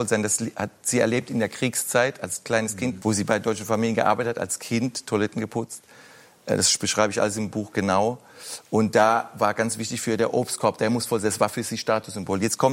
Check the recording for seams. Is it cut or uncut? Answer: cut